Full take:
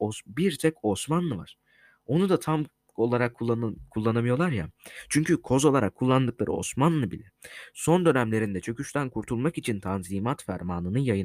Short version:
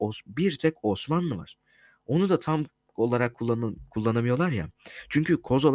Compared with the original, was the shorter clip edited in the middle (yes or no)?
no